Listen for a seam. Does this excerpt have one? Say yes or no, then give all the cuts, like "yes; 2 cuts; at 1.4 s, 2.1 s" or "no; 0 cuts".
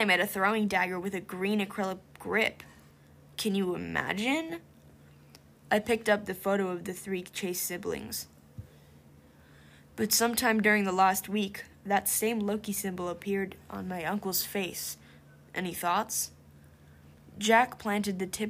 no; 0 cuts